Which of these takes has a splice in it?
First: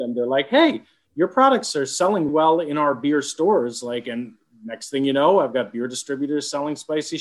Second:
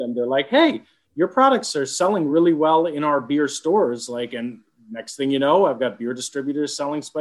first; 1 cut; at 2.3 s

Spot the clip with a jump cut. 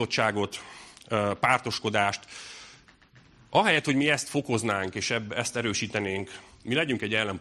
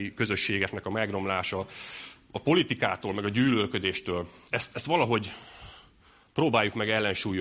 second; 1 cut; at 4.5 s

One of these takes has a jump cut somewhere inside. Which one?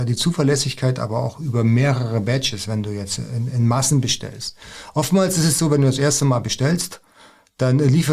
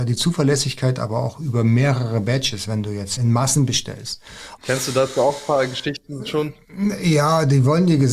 second; 2 cuts; at 3.2 s, 4.6 s

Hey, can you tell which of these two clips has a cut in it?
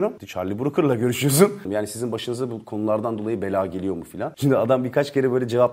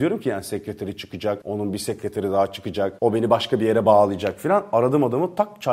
first; 1 cut; at 1.6 s

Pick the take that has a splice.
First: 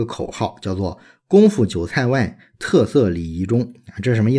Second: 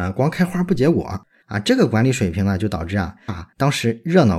second; 2 cuts; at 1.4 s, 3.3 s

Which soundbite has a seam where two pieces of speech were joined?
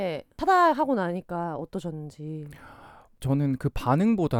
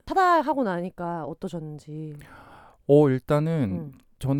first; 1 cut; at 3.1 s

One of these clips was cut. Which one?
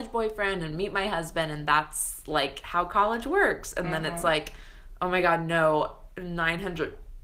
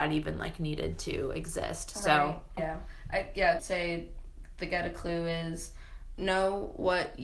second; 3 cuts; at 2.6 s, 3.6 s, 6.2 s

